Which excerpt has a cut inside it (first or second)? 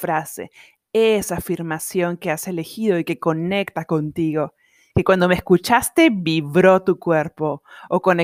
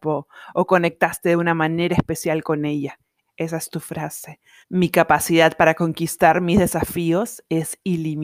second